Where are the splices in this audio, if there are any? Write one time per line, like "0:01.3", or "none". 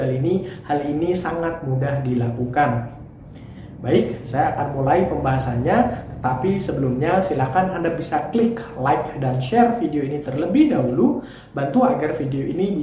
none